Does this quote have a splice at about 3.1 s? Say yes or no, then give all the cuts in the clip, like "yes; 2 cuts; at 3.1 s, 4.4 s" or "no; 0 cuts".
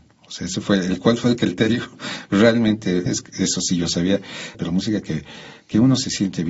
yes; 2 cuts; at 3.1 s, 4.5 s